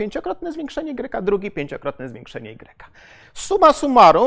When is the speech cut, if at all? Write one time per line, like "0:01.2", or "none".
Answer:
none